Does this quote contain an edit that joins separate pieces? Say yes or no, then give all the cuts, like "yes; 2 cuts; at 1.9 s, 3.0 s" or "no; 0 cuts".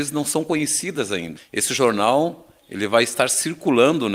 no; 0 cuts